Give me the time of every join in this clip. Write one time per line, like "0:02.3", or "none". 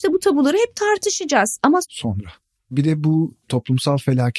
0:01.8